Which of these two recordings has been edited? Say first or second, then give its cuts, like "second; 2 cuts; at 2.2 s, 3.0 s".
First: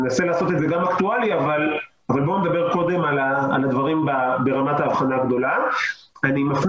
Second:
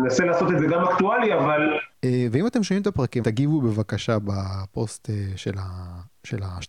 second; 2 cuts; at 1.9 s, 3.2 s